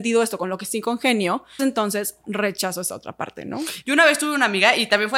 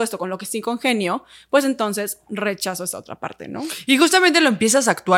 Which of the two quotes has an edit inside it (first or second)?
first